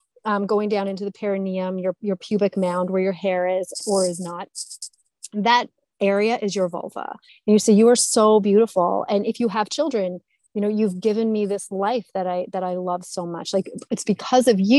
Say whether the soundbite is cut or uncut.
cut